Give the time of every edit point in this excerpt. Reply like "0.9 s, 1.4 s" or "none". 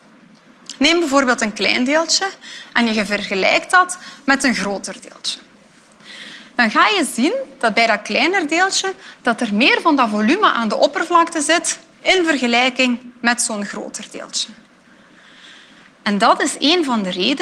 none